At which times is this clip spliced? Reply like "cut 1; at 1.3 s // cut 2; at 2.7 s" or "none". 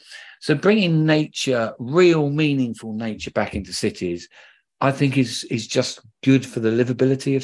none